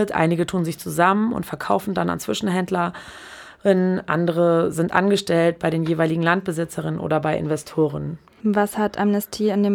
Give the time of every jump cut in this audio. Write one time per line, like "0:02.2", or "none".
0:08.4

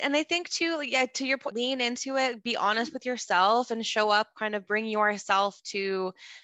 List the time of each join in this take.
0:01.5

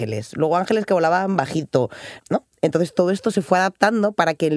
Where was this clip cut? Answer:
0:02.2

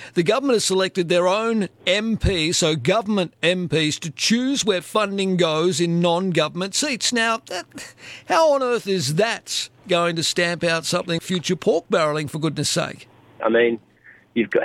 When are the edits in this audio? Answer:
0:11.2
0:13.4

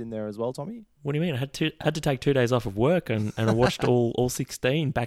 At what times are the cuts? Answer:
none

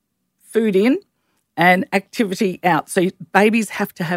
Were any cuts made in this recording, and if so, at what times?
none

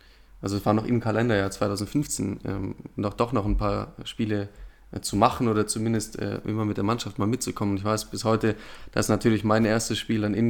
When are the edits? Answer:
none

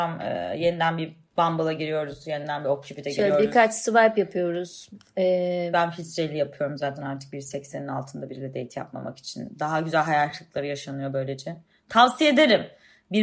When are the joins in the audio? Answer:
0:05.7

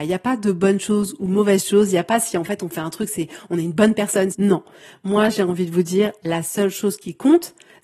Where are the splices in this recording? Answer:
0:04.3

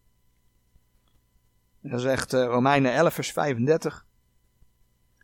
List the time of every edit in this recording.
none

